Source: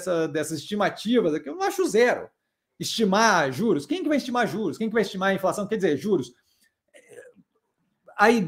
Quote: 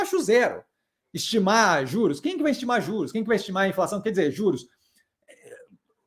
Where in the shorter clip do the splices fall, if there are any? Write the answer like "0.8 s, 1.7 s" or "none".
none